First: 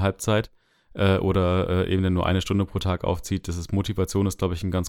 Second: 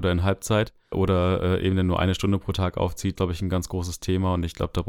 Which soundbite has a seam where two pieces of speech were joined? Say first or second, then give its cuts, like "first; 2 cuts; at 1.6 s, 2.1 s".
second; 2 cuts; at 0.9 s, 3.2 s